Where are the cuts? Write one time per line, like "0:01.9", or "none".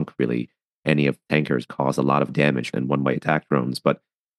0:01.7
0:02.7